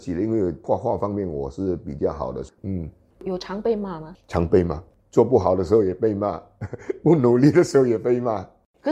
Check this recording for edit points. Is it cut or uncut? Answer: cut